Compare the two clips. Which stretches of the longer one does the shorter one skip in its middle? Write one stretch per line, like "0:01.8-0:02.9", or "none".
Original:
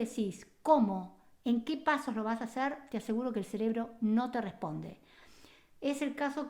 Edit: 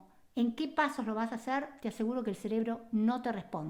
none